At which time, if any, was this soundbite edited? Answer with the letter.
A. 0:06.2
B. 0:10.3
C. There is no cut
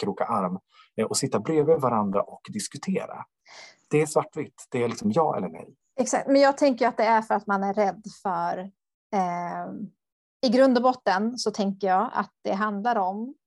C